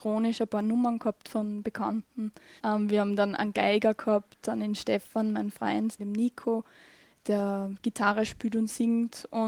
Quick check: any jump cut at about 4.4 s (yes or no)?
no